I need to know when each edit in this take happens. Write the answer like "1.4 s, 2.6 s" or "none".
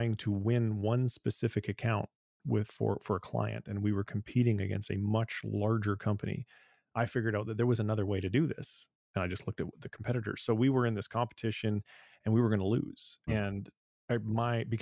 13.3 s